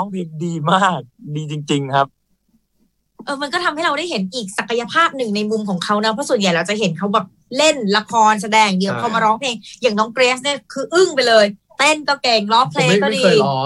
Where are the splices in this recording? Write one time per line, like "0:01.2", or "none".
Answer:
none

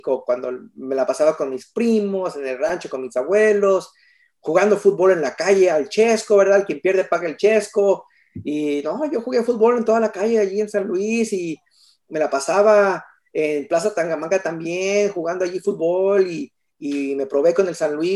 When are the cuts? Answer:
none

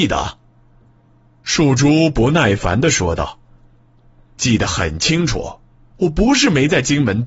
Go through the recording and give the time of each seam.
none

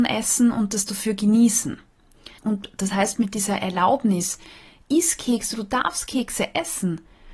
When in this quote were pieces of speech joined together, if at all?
0:02.4

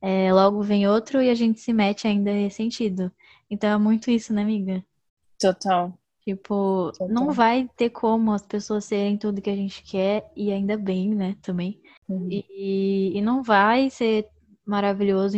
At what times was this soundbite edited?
none

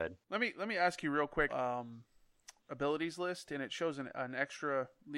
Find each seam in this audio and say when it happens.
0:01.5
0:02.6

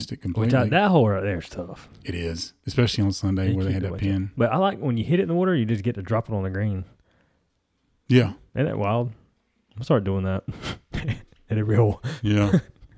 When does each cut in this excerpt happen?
none

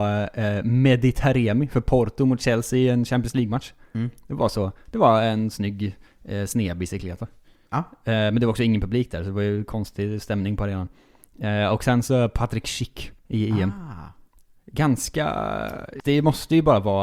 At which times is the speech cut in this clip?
0:13.2
0:16.0

